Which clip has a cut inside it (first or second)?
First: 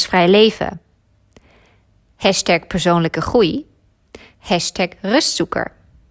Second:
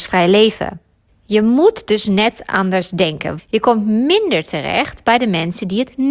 second